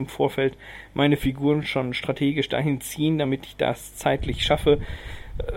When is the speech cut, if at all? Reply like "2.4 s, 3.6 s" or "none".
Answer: none